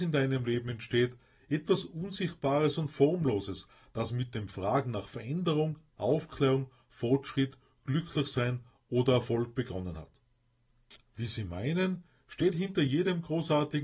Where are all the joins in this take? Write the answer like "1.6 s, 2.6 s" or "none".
11.0 s